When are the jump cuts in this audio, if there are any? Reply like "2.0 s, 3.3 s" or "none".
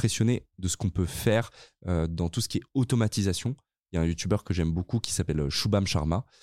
none